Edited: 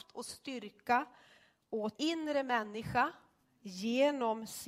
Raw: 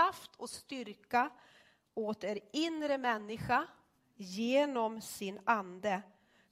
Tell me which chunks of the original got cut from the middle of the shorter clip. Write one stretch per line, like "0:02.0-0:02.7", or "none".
0:02.2-0:02.5

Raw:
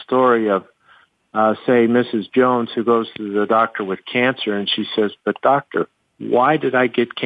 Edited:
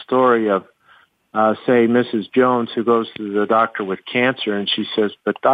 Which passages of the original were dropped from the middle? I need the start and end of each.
none

